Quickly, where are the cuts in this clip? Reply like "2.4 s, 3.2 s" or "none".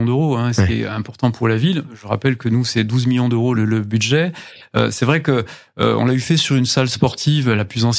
3.5 s